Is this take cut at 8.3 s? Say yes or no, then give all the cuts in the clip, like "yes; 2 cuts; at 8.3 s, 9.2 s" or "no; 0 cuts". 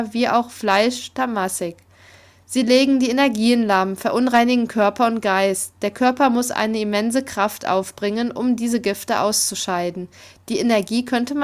no; 0 cuts